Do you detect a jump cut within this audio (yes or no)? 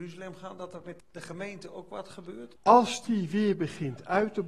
yes